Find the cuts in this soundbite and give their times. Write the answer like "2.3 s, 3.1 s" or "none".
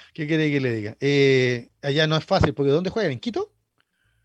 none